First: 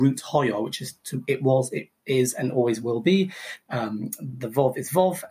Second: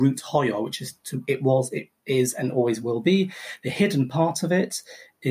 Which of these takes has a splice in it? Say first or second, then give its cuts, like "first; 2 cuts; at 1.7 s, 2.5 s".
first; 1 cut; at 3.6 s